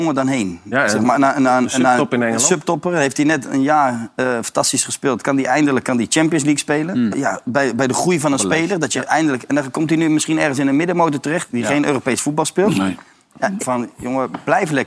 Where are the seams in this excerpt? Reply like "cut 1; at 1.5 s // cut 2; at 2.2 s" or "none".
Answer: cut 1; at 7.1 s // cut 2; at 13.6 s